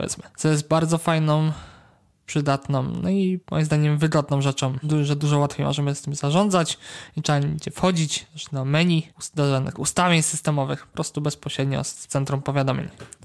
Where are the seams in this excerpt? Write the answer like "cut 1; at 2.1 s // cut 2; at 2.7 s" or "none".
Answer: none